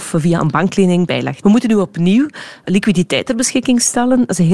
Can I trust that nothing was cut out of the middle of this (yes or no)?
no